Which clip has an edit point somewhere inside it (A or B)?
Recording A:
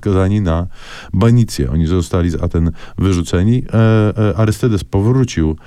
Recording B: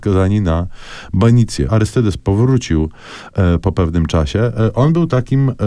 B